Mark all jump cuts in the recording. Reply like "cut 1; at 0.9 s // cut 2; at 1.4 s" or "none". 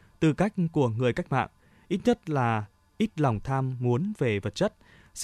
none